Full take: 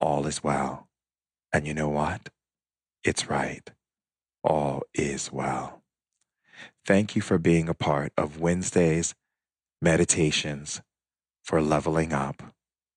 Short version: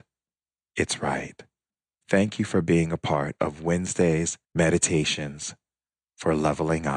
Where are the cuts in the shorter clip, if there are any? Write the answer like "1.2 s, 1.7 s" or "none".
2.0 s, 4.4 s